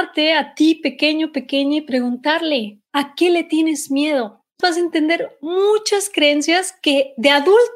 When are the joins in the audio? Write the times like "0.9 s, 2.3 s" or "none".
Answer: 4.6 s

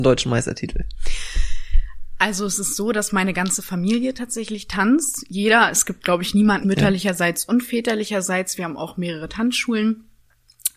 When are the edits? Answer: 6.6 s

